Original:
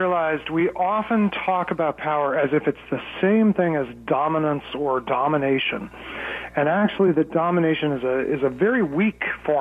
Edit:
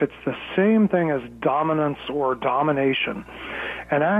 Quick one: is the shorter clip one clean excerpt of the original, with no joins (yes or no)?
yes